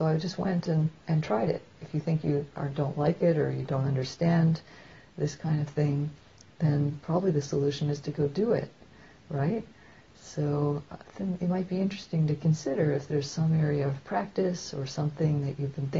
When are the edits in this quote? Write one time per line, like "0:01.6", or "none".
none